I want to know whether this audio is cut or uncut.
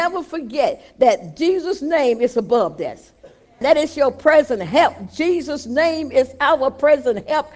cut